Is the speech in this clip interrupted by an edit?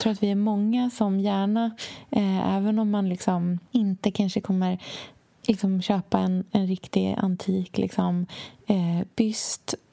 yes; 1 cut; at 6.5 s

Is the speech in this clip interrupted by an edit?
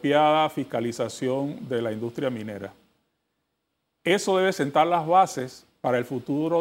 no; 0 cuts

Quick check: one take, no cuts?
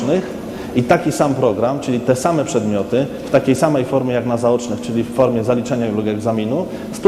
yes; 0 cuts

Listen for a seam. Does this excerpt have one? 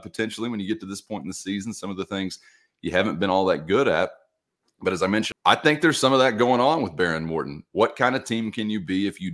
yes; 1 cut; at 5.3 s

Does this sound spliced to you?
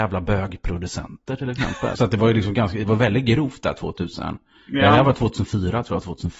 yes; 1 cut; at 1.9 s

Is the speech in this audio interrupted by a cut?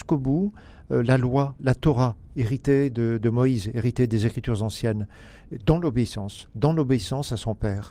yes; 1 cut; at 1.6 s

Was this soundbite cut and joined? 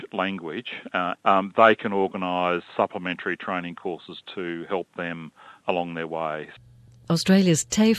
yes; 2 cuts; at 1.1 s, 2.7 s

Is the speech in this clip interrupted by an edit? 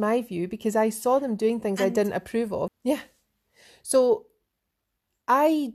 yes; 1 cut; at 2.7 s

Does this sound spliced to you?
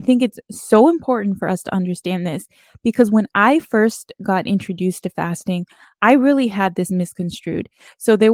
no; 0 cuts

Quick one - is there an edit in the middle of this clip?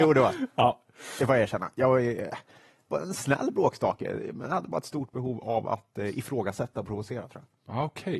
no; 0 cuts

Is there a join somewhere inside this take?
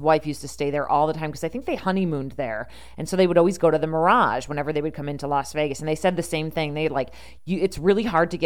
no; 0 cuts

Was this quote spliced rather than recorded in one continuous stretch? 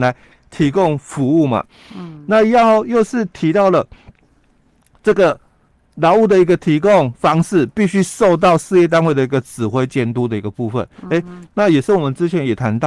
no; 0 cuts

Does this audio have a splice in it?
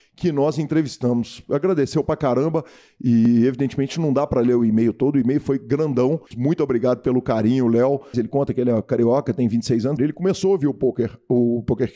yes; 3 cuts; at 6.3 s, 8.1 s, 10.0 s

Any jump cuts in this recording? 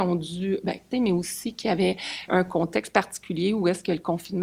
yes; 2 cuts; at 0.9 s, 2.3 s

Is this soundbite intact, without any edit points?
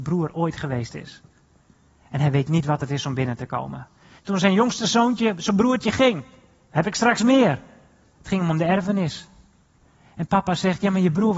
no; 1 cut; at 4.2 s

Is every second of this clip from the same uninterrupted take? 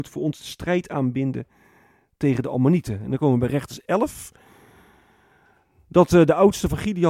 yes; 0 cuts

